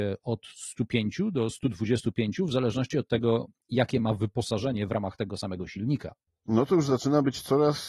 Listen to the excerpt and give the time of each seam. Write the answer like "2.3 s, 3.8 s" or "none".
none